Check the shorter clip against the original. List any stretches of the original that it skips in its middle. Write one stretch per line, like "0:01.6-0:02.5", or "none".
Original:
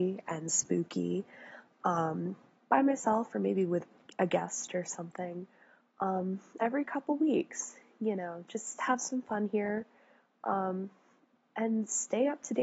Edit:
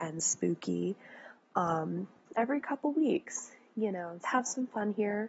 0:02.5-0:06.5
0:08.5-0:08.8